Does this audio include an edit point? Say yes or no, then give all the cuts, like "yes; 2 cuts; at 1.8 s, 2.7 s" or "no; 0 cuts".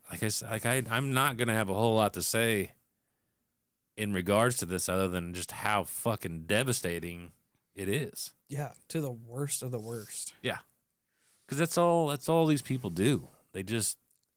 yes; 1 cut; at 8.4 s